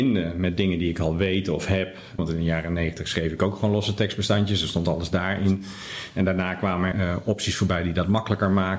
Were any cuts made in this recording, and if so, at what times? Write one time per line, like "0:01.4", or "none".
0:02.2
0:06.9